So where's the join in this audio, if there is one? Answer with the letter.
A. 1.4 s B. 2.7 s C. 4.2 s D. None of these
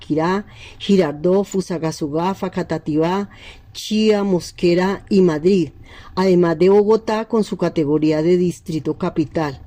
D